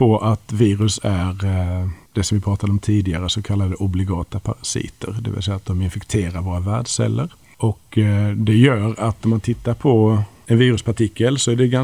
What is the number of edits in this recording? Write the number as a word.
zero